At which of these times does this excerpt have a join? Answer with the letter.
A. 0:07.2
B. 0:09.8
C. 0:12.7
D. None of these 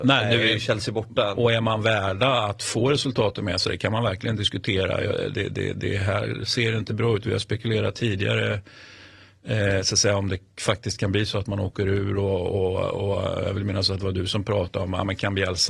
D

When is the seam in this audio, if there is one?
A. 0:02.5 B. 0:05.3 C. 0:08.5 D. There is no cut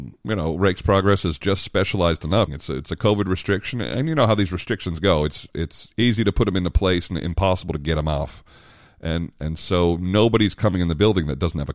A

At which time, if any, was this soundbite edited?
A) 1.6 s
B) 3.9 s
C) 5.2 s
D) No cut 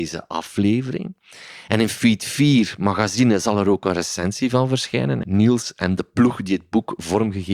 C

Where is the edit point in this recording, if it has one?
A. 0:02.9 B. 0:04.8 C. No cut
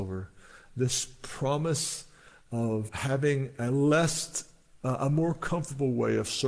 A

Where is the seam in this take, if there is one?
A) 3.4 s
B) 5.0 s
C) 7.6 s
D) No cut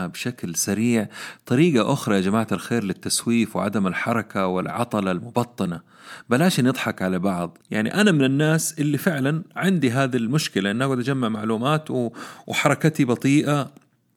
C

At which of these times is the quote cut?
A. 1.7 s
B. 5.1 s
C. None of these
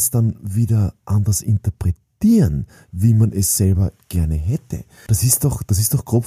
B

